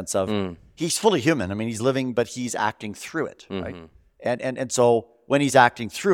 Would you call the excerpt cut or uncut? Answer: uncut